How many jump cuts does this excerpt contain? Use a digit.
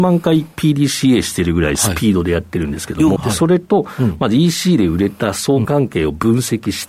2